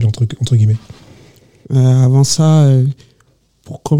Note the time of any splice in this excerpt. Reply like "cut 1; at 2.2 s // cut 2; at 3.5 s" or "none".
none